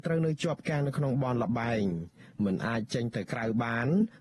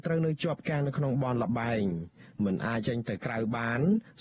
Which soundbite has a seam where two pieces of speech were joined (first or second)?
second